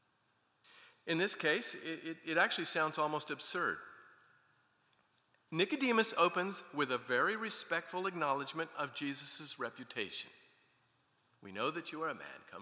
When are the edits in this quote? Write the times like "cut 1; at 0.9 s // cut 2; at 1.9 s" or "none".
none